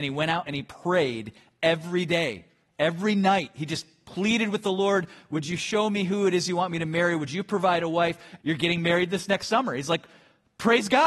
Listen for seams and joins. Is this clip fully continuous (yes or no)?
no